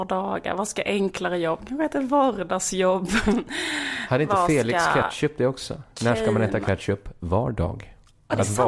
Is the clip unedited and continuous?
yes; 0 cuts

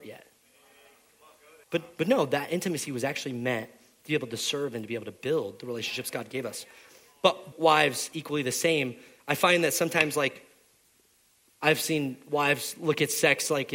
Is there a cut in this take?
yes; 2 cuts; at 1.6 s, 7.5 s

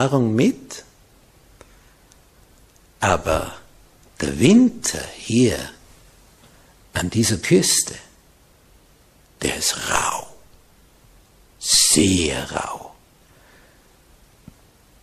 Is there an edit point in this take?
no; 0 cuts

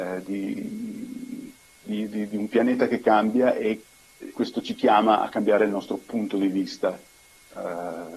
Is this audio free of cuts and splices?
no; 2 cuts; at 2.3 s, 4.3 s

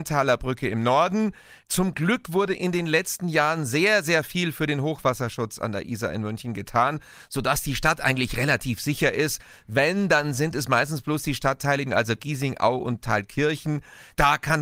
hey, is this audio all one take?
no; 1 cut; at 11.9 s

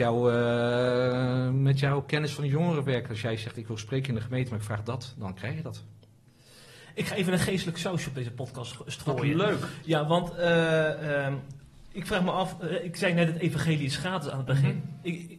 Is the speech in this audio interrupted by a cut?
no; 0 cuts

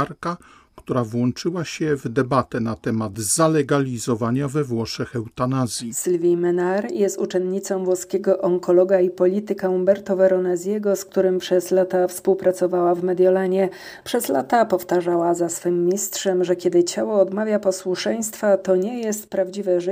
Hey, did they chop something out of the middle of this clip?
yes; 1 cut; at 14.0 s

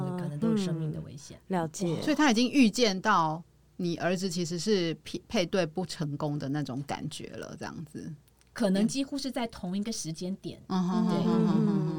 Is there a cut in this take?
no; 0 cuts

